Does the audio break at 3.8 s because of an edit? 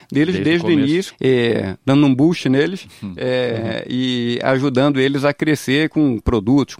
no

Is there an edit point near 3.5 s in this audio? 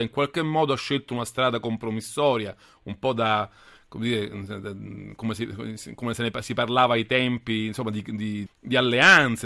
no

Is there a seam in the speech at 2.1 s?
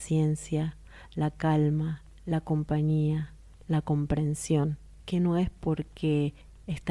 no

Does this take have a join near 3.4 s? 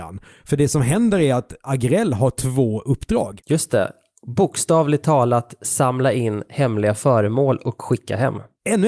yes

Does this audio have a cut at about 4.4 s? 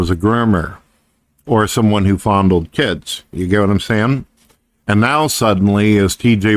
no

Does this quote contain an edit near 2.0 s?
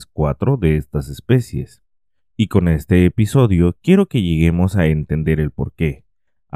no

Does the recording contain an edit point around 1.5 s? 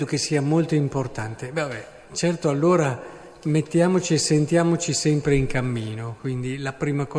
no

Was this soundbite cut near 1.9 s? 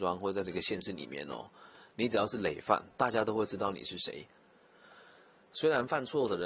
no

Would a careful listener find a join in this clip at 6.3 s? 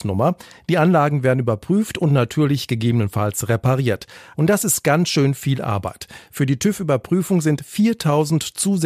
no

